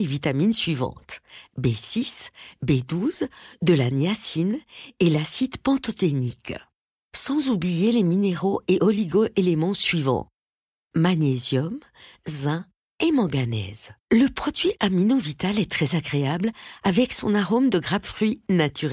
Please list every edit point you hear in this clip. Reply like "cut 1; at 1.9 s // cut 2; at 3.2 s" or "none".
cut 1; at 14.0 s